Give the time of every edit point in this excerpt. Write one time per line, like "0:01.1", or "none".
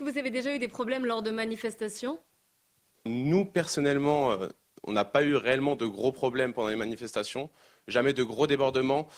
0:03.1